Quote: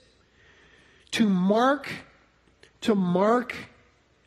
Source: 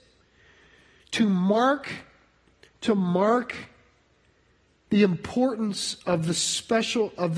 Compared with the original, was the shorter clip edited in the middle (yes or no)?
no